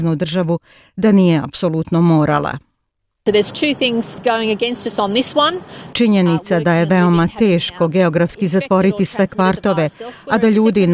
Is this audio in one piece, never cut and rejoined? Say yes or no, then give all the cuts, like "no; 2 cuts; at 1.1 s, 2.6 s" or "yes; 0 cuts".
no; 2 cuts; at 4.2 s, 5.9 s